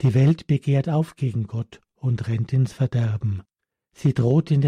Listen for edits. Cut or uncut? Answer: uncut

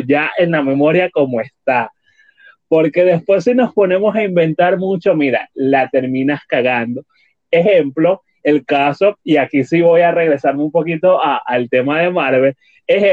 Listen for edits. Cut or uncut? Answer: uncut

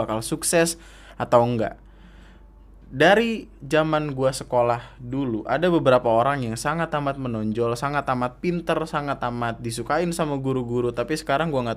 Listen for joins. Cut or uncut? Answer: uncut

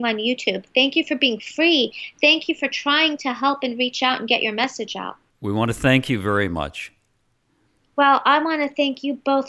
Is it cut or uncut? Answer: cut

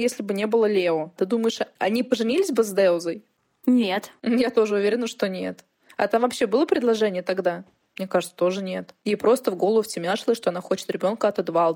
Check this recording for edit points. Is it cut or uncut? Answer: cut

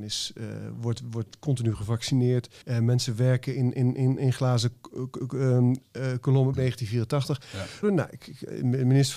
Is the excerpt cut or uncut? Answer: cut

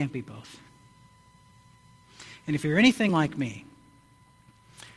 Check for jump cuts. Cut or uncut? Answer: uncut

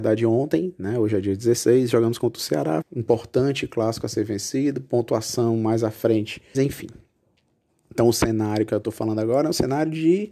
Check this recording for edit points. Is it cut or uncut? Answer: cut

